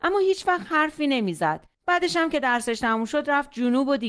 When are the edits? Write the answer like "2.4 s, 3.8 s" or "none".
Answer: 1.7 s